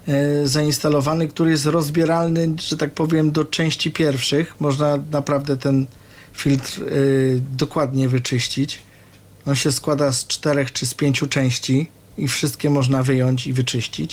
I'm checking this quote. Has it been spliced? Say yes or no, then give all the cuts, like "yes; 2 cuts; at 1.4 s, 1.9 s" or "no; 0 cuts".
no; 0 cuts